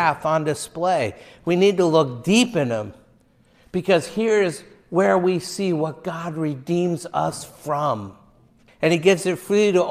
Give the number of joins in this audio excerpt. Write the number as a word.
one